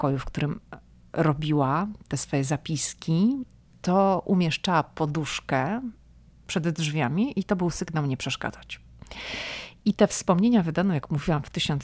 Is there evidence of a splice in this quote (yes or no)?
no